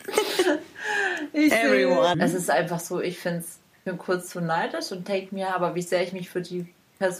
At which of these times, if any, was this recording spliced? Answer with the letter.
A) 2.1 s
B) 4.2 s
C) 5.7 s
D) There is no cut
A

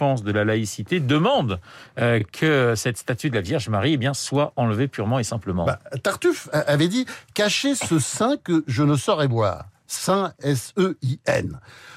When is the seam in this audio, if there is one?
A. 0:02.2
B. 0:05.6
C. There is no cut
C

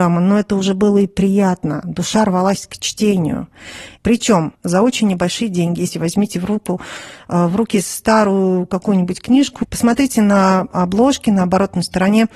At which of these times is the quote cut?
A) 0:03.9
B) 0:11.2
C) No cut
A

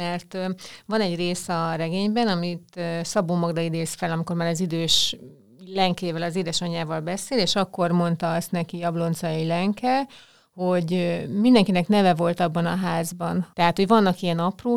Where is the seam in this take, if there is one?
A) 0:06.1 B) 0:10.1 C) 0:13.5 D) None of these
C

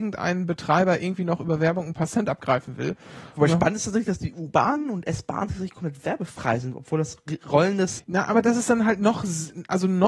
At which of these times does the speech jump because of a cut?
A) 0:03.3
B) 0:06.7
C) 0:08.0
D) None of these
C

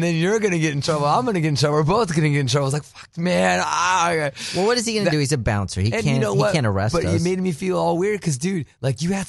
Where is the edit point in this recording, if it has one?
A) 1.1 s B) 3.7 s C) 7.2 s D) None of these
D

